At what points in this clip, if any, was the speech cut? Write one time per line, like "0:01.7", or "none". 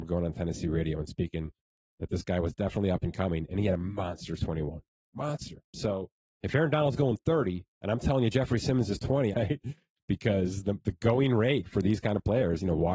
0:05.7
0:07.7
0:09.3